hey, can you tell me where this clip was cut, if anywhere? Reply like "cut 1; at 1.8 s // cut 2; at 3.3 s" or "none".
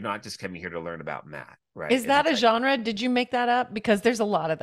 none